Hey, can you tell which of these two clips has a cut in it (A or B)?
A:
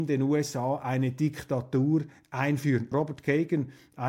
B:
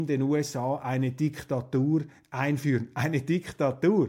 A